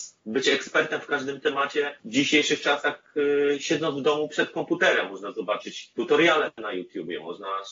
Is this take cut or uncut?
uncut